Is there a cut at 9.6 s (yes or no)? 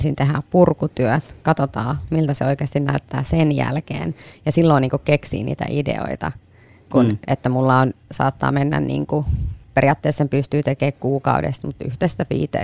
no